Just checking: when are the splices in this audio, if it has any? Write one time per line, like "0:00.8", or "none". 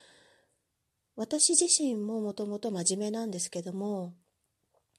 none